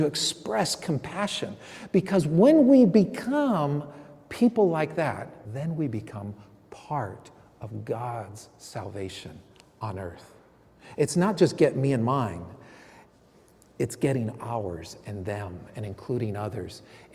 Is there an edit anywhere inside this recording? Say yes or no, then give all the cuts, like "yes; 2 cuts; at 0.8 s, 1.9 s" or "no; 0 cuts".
yes; 1 cut; at 5.4 s